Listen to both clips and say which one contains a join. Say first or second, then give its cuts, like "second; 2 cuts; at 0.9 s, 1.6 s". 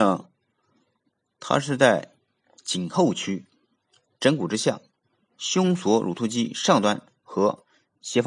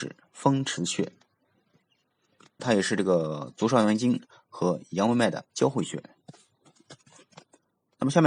second; 2 cuts; at 2.6 s, 5.5 s